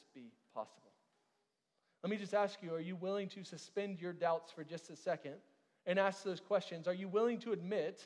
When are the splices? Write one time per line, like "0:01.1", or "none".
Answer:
none